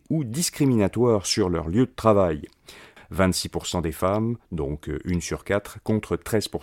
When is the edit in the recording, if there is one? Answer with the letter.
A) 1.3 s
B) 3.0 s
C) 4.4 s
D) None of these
B